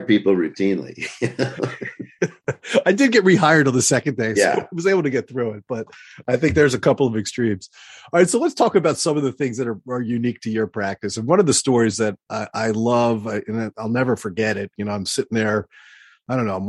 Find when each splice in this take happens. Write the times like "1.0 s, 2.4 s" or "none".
none